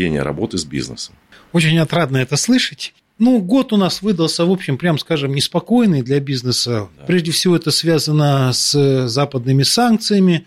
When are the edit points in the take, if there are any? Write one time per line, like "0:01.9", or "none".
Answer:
none